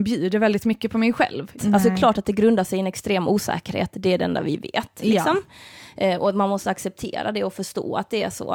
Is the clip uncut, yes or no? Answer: no